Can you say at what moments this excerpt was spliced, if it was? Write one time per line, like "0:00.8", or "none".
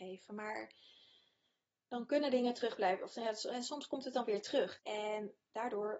0:04.8